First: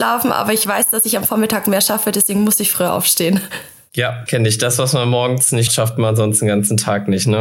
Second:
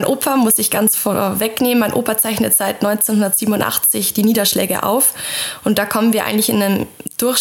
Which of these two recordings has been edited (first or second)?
first